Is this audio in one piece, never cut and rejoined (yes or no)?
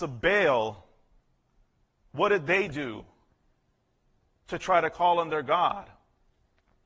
yes